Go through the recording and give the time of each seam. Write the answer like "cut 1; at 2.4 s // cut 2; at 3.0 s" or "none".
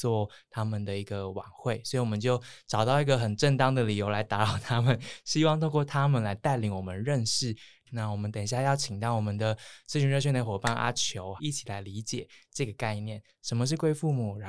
cut 1; at 7.9 s // cut 2; at 11.4 s